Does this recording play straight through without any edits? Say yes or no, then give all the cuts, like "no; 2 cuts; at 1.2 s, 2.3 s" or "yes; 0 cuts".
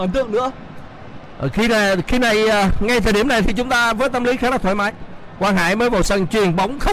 yes; 0 cuts